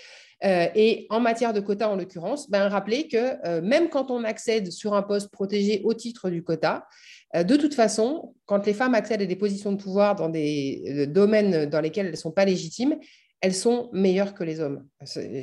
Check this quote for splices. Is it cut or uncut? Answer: uncut